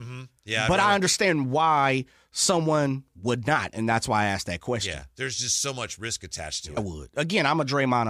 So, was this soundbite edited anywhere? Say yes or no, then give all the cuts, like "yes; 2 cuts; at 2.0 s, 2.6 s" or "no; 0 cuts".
yes; 1 cut; at 6.8 s